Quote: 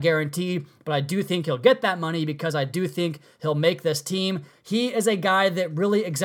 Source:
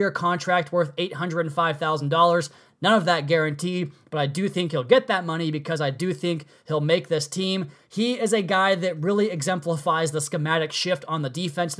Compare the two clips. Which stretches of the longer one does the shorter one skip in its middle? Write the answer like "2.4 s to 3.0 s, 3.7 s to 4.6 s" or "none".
none